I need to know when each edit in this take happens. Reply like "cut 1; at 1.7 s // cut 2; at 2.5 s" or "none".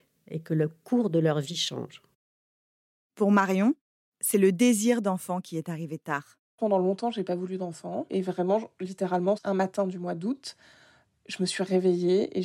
cut 1; at 6.5 s // cut 2; at 8.1 s // cut 3; at 9.4 s